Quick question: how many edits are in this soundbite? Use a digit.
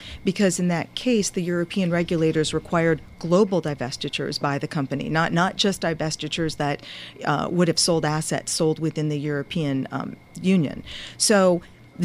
0